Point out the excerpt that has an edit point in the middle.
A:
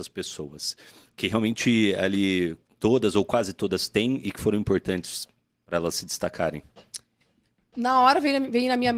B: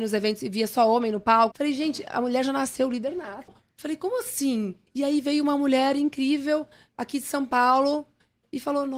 B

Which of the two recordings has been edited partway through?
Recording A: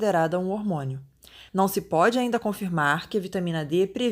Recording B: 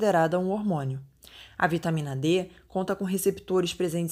A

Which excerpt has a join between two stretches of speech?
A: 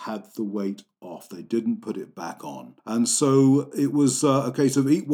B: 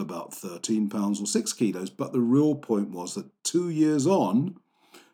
A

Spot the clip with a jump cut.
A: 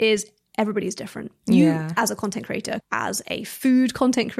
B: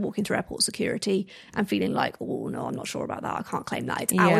A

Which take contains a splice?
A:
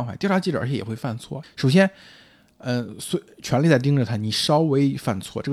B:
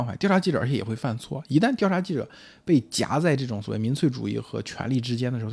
A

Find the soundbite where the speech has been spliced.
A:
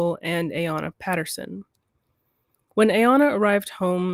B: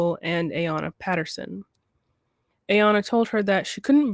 B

